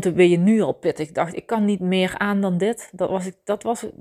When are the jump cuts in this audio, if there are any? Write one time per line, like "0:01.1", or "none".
none